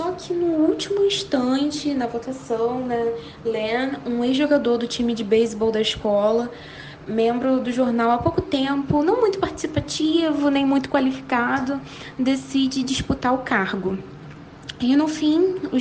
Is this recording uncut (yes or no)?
yes